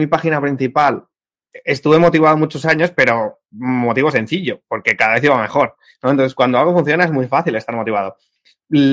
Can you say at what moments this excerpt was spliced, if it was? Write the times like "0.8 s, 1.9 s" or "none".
none